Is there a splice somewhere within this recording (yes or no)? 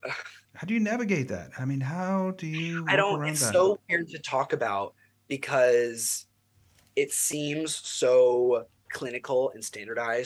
no